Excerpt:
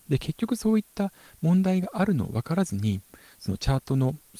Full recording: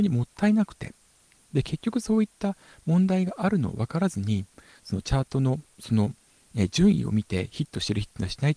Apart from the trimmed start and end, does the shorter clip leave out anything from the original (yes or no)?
no